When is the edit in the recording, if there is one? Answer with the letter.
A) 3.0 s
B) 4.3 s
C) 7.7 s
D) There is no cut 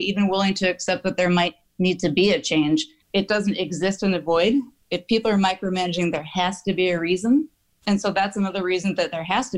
A